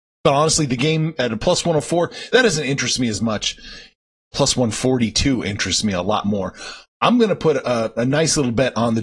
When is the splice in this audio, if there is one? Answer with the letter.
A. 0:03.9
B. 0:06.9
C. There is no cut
C